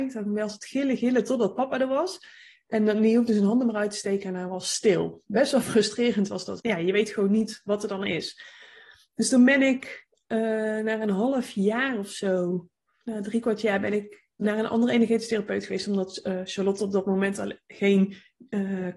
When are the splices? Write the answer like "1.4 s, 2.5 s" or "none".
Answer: 6.6 s

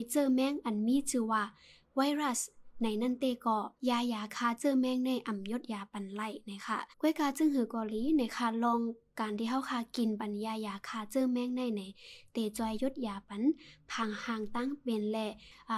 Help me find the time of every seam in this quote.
3.8 s, 6.9 s

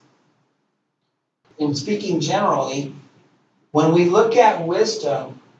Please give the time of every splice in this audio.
1.4 s

